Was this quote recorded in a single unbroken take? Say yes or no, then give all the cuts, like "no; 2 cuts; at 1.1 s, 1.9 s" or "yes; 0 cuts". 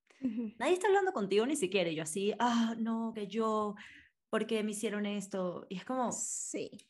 yes; 0 cuts